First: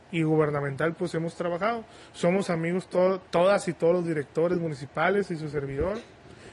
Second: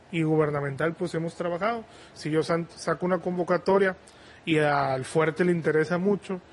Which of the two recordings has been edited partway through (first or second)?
second